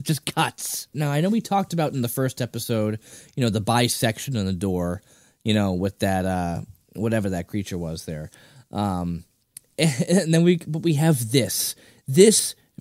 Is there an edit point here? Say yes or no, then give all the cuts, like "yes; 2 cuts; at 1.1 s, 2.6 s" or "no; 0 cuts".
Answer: yes; 1 cut; at 0.9 s